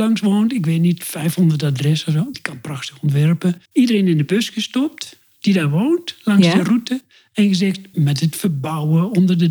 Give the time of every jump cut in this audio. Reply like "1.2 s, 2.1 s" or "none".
2.3 s, 3.7 s, 7.9 s